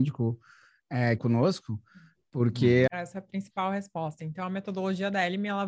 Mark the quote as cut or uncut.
cut